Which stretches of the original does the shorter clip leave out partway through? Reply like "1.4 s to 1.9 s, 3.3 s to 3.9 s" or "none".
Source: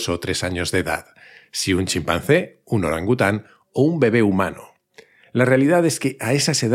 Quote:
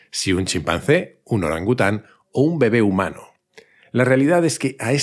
none